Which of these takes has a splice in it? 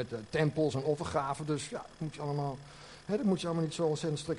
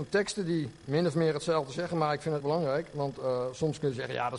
second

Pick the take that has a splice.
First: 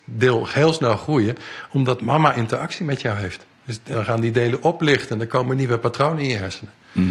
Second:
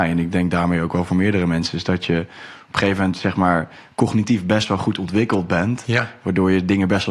first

